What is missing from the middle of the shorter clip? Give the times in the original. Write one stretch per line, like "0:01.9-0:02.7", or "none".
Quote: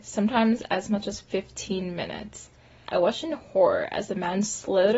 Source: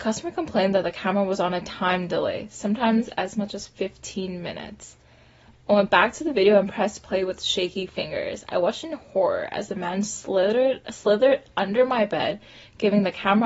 0:05.3-0:08.5